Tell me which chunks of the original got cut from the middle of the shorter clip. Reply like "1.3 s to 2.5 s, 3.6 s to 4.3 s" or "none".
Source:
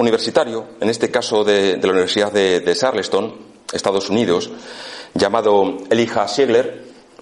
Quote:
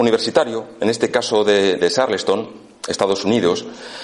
1.8 s to 2.6 s